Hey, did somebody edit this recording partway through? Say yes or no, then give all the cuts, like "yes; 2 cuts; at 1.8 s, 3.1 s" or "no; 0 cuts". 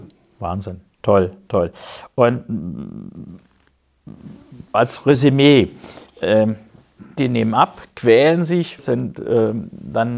yes; 3 cuts; at 4.7 s, 7.2 s, 8.8 s